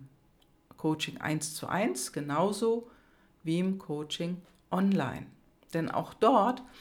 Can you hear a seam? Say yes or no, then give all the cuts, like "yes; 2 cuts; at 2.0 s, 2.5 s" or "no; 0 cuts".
no; 0 cuts